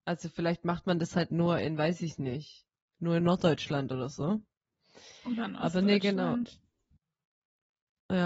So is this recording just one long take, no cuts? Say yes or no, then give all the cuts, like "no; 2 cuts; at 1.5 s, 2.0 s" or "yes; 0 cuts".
yes; 0 cuts